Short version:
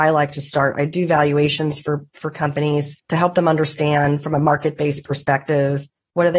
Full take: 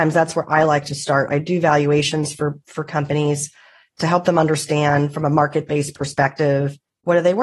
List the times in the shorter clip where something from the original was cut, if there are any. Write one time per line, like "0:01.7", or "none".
0:03.0